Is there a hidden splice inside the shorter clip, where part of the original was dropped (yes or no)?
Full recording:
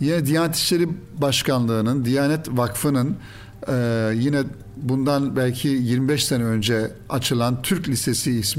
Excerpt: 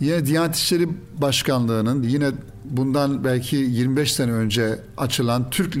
yes